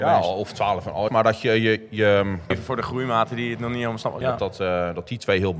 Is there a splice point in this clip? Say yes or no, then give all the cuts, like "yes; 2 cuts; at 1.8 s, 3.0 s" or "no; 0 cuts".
yes; 3 cuts; at 1.1 s, 2.5 s, 4.2 s